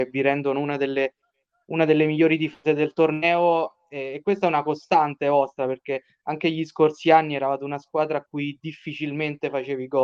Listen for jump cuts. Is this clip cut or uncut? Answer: uncut